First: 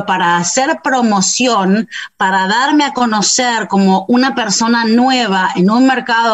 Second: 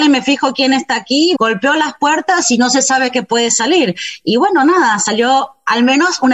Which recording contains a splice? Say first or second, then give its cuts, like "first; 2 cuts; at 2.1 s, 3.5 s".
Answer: second; 1 cut; at 1.4 s